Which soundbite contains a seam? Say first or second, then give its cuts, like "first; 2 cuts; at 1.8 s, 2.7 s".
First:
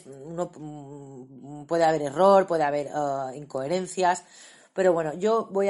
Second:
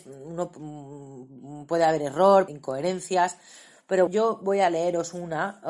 second; 2 cuts; at 2.5 s, 4.1 s